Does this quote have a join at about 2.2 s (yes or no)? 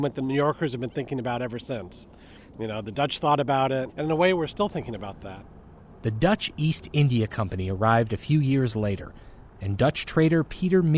no